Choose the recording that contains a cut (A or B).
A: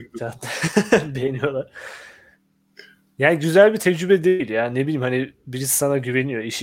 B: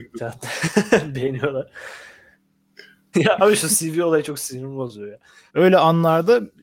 B